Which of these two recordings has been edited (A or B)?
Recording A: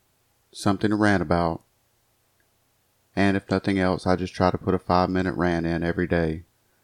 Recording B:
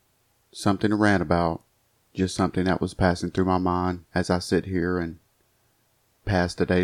B